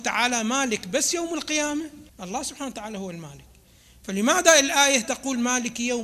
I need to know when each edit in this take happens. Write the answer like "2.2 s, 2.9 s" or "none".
2.1 s